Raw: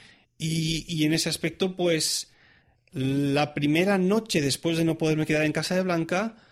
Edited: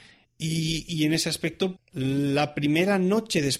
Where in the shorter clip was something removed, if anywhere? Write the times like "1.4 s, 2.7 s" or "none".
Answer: 1.8 s